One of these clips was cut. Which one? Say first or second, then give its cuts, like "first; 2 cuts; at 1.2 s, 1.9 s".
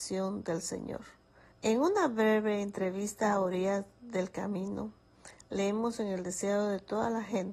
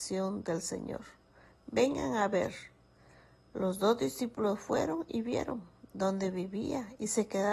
first; 1 cut; at 1.5 s